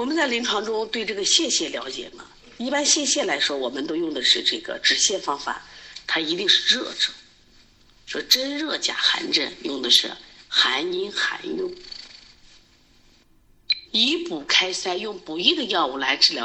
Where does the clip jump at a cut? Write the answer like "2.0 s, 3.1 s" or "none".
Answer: 6.0 s, 13.8 s